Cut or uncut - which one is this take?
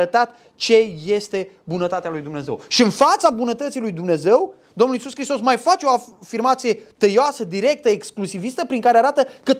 uncut